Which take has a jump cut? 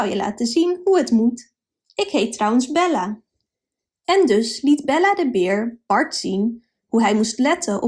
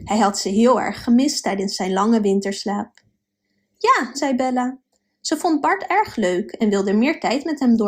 second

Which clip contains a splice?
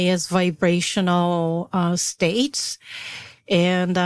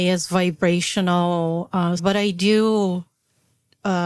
second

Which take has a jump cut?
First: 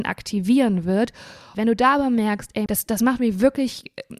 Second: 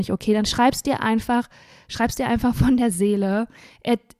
first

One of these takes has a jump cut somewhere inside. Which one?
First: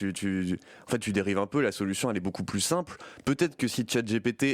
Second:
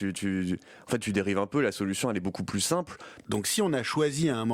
second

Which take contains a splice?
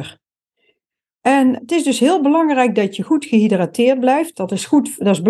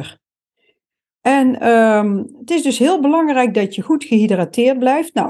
first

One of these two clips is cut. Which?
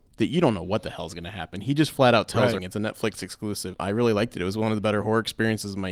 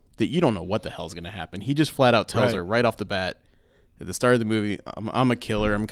first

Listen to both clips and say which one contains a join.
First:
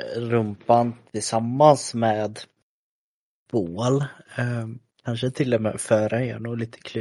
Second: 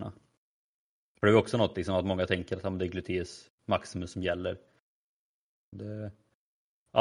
second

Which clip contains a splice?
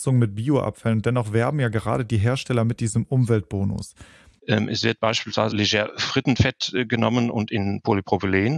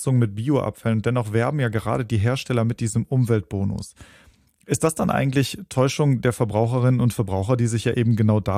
first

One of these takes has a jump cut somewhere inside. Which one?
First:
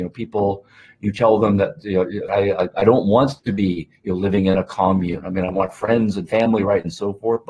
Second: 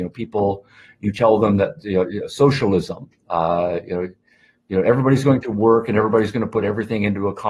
first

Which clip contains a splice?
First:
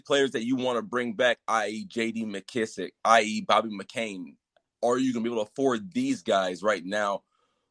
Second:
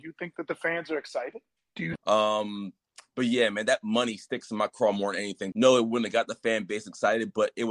second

